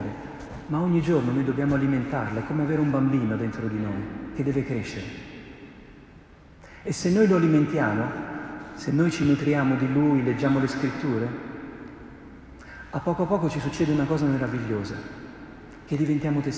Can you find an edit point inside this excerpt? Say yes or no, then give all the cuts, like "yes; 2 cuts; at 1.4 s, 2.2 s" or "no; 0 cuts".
no; 0 cuts